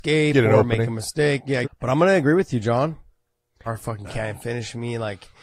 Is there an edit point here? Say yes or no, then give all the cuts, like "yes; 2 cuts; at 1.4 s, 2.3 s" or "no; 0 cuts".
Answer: yes; 2 cuts; at 1.6 s, 3.7 s